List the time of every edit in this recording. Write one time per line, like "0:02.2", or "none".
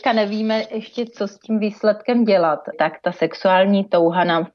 0:02.7

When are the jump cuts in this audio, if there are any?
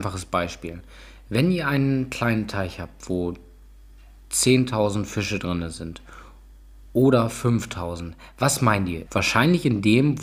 0:09.1

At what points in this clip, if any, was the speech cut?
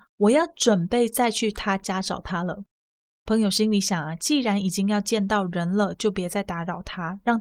none

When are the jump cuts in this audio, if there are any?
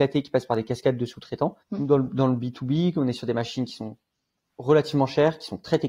0:01.6

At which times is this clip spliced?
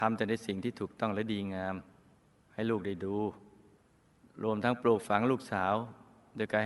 none

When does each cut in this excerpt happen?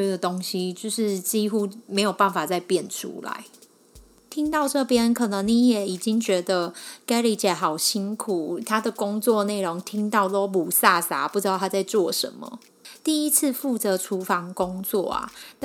0:01.8

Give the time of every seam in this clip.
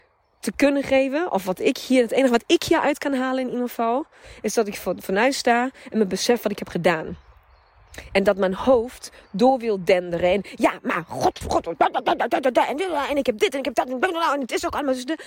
0:11.4

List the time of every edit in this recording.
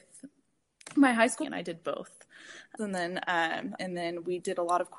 0:01.4
0:02.8
0:03.8

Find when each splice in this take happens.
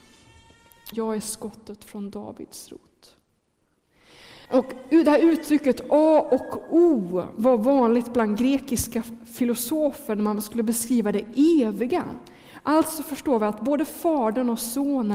0:00.9
0:04.5

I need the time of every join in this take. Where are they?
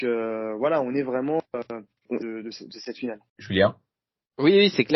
0:02.2

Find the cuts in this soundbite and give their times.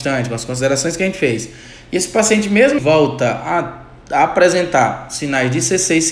0:02.8

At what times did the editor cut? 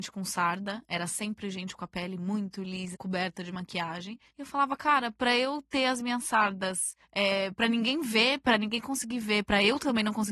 0:02.9

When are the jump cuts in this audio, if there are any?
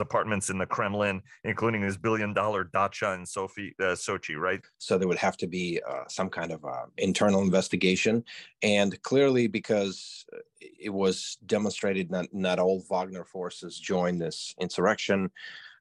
0:04.6

